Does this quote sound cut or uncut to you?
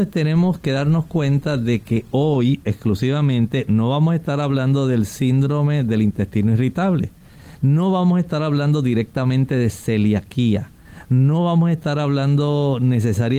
uncut